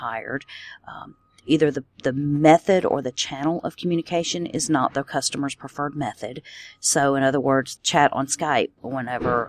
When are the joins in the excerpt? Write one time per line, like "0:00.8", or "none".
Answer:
0:07.8